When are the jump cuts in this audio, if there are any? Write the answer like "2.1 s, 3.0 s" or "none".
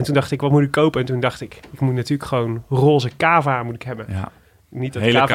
none